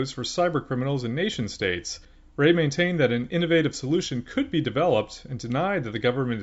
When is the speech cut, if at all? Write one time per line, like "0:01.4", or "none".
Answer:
none